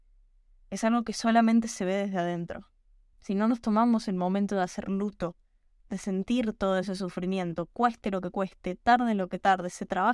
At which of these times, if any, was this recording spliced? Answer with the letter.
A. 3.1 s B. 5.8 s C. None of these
A